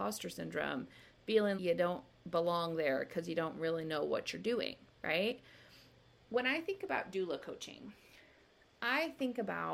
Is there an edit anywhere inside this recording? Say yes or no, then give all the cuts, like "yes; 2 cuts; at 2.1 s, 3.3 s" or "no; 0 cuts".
yes; 1 cut; at 1.6 s